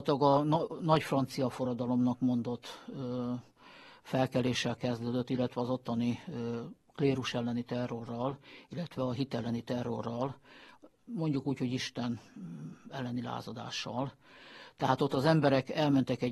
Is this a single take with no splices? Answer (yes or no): yes